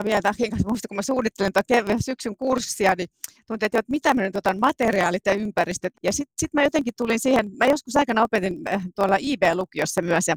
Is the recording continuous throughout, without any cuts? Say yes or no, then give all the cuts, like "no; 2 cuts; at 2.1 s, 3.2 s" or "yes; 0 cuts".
no; 1 cut; at 5.9 s